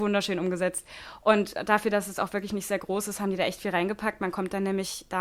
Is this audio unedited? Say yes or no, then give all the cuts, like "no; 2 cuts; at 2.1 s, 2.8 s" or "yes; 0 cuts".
yes; 0 cuts